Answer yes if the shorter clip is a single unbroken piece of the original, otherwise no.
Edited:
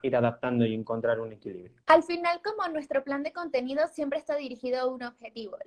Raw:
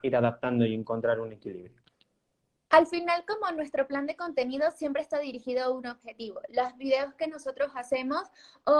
no